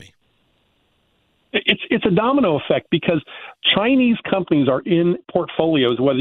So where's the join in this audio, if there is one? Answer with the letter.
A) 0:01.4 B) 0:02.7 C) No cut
C